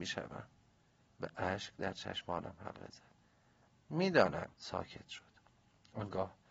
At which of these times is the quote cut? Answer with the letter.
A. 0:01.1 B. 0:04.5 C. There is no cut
B